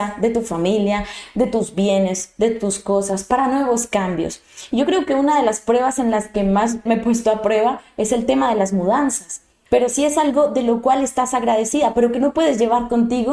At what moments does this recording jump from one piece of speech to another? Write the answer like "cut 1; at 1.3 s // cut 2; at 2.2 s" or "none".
cut 1; at 6.9 s // cut 2; at 9.7 s